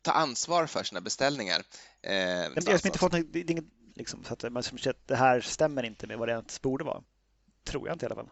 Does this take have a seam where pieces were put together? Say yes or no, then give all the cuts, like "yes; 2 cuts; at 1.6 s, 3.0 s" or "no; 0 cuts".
yes; 2 cuts; at 2.6 s, 3.9 s